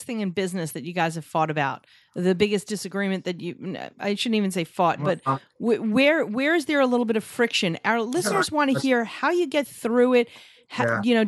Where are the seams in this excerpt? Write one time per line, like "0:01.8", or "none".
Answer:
none

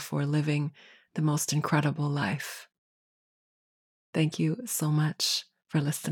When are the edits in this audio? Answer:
0:04.0

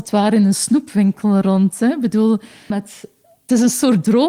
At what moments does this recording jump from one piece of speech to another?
0:02.7

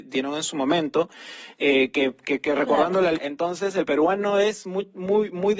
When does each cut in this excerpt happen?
0:03.1

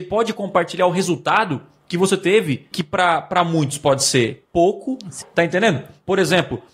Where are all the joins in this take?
0:02.7
0:05.2

